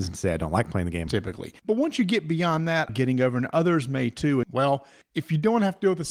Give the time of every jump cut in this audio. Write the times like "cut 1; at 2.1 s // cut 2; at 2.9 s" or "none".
cut 1; at 1.1 s // cut 2; at 2.9 s // cut 3; at 4.4 s